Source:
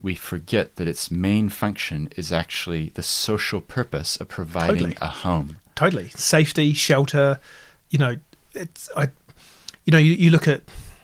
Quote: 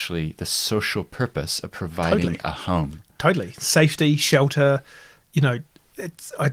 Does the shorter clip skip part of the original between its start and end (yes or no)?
no